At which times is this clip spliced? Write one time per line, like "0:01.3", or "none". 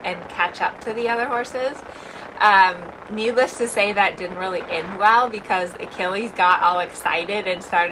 none